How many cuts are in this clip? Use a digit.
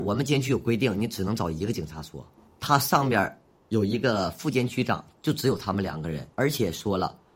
1